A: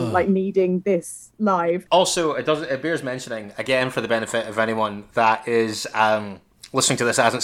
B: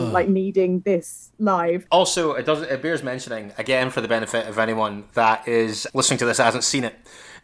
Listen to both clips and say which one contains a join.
B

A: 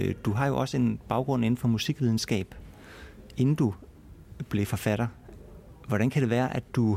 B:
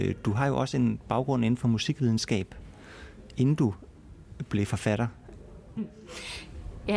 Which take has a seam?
B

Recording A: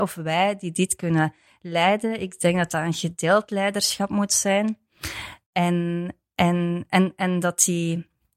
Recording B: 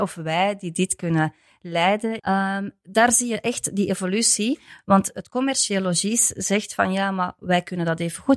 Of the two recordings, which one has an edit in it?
B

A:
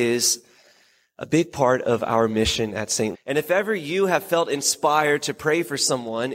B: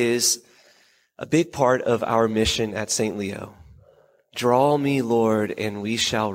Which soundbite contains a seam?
A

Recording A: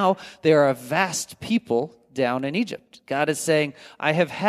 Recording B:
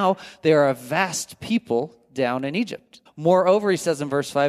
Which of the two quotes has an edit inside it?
B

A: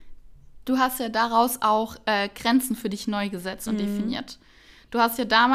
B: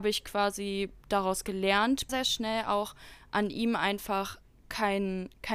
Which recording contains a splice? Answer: B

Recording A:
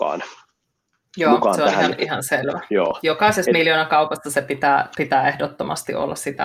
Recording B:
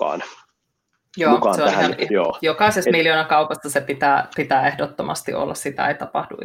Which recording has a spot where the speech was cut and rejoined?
B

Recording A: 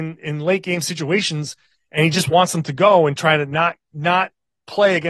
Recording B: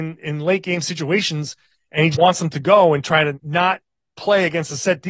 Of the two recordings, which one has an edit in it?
B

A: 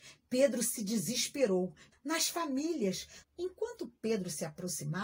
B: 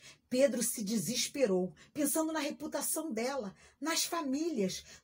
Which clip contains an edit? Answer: A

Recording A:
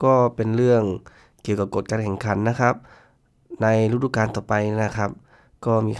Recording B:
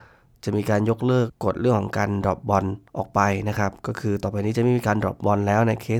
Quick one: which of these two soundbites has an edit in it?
B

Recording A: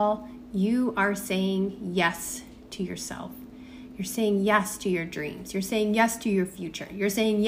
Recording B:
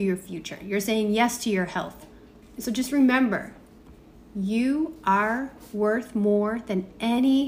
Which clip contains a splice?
B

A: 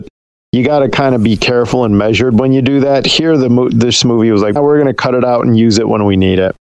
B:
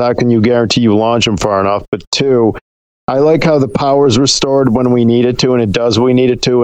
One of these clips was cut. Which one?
A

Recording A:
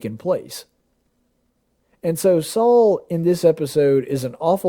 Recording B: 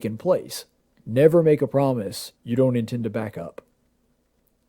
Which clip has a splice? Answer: B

